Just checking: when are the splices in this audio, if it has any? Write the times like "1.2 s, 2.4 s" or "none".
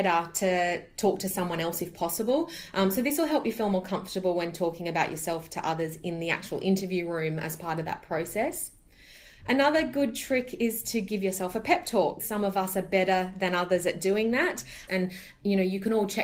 12.2 s, 14.9 s